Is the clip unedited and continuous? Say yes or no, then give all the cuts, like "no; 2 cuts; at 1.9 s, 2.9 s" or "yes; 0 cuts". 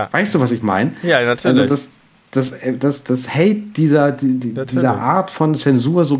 yes; 0 cuts